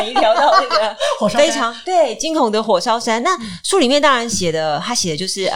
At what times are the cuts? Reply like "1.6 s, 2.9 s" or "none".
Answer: none